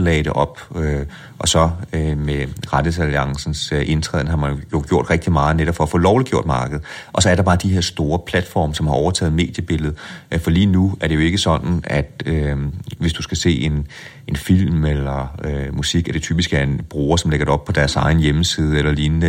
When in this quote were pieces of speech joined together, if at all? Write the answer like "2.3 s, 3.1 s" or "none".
none